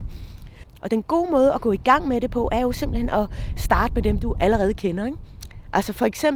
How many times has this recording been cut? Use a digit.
0